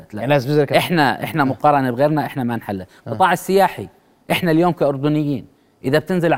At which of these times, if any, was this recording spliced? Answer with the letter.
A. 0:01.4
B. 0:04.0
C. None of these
C